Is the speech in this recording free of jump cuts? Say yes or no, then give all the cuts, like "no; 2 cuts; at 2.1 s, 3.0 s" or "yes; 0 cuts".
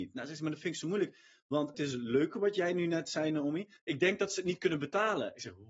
no; 2 cuts; at 1.7 s, 3.8 s